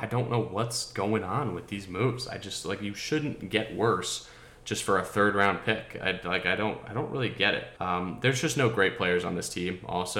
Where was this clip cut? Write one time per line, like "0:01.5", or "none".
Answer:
0:07.8